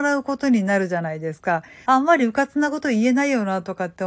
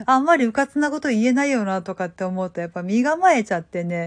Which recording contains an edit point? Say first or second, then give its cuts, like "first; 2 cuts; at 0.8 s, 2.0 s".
first; 1 cut; at 1.9 s